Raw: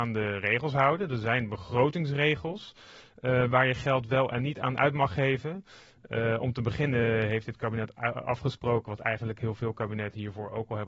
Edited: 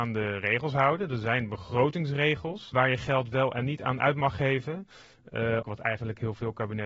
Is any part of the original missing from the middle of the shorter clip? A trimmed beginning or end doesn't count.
yes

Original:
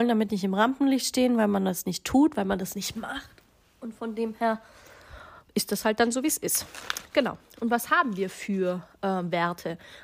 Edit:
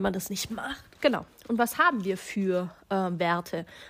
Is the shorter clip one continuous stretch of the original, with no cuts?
no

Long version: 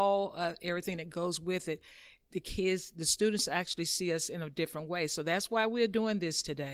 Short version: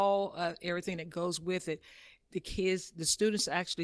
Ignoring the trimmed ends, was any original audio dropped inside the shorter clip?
no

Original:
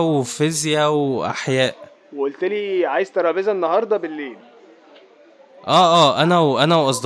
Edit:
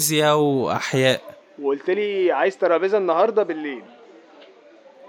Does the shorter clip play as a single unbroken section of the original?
yes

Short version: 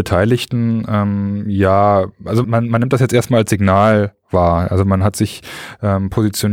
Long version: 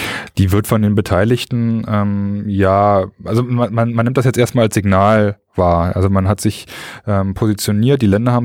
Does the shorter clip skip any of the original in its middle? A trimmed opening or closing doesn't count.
yes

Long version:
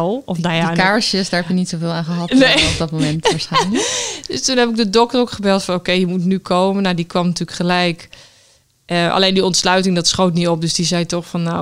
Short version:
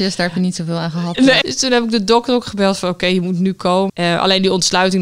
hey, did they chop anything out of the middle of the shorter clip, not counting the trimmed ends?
yes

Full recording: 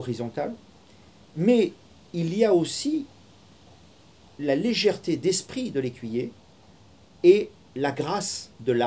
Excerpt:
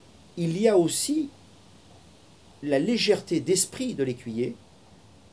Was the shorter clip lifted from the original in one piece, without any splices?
yes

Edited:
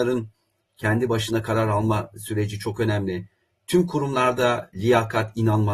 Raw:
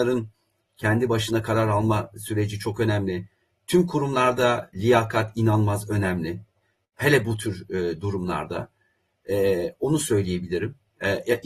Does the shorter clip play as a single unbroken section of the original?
yes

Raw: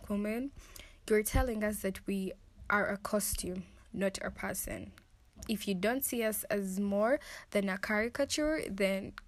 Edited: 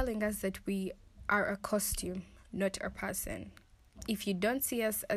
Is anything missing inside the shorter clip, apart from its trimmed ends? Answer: no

